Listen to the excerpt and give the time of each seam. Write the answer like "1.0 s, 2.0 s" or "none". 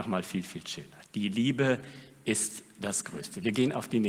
none